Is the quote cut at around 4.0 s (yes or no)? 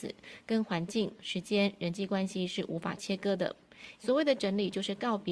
yes